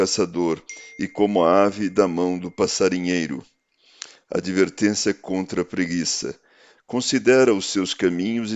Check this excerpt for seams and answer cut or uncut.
cut